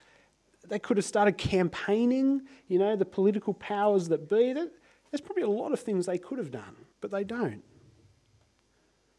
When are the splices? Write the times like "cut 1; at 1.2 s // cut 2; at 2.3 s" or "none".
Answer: cut 1; at 6.9 s